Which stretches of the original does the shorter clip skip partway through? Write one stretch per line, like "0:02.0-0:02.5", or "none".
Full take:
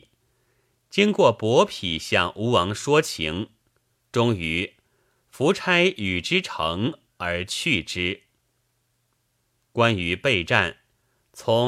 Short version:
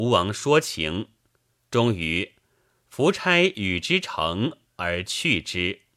none